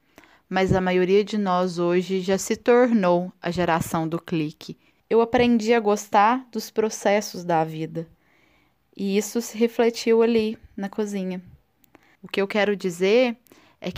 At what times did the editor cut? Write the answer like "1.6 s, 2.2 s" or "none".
5.0 s, 12.1 s